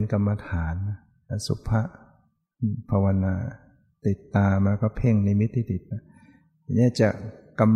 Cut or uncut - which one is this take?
uncut